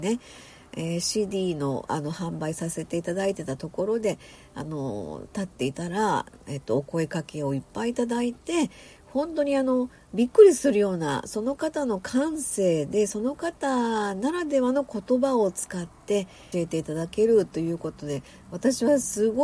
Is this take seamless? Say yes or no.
no